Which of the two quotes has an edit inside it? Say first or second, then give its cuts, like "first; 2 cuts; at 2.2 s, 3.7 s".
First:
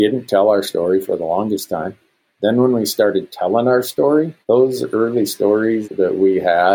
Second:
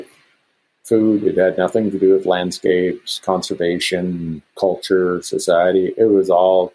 first; 2 cuts; at 4.4 s, 5.8 s